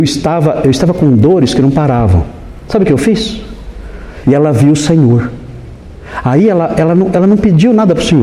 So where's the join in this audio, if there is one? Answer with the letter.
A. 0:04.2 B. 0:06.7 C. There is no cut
A